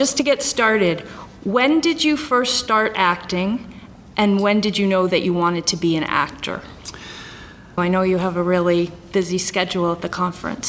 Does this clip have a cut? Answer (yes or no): yes